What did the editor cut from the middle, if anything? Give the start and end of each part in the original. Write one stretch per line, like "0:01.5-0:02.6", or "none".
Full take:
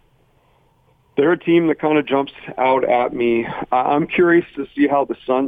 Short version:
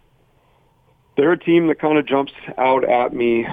none